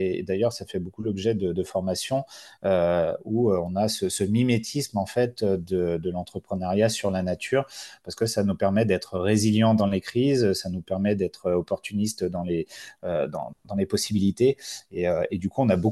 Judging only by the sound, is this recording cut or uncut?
uncut